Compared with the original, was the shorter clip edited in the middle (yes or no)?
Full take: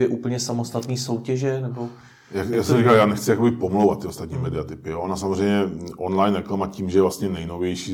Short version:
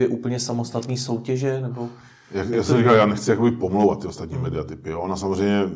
no